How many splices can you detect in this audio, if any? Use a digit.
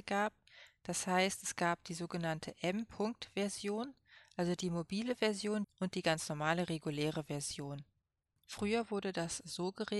2